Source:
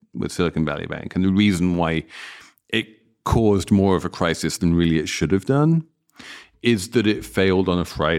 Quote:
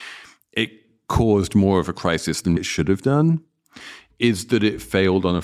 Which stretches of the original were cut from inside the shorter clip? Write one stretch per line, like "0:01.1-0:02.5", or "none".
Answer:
0:04.7-0:05.0